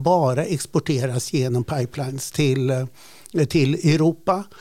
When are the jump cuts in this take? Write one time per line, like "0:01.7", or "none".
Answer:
none